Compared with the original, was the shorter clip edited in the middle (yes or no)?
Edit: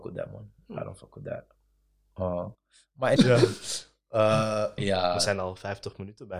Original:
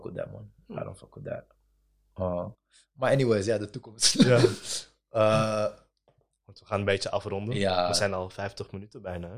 yes